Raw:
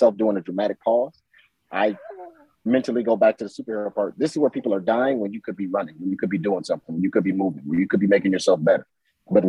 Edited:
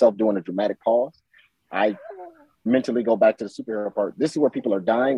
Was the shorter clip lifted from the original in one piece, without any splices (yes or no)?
yes